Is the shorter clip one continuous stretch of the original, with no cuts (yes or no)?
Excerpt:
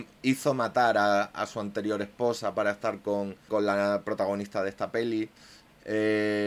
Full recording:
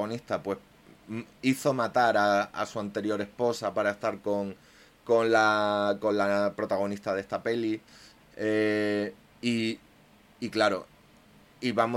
no